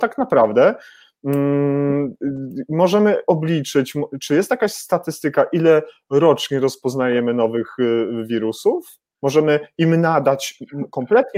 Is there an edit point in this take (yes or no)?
no